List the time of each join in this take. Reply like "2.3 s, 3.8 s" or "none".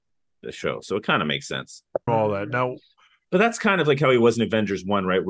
2.1 s